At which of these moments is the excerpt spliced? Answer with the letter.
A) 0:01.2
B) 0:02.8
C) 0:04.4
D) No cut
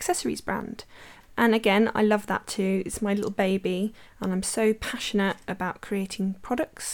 A